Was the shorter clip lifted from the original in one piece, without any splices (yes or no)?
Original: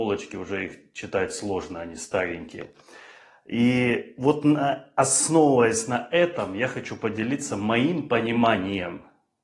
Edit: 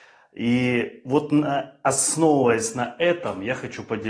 yes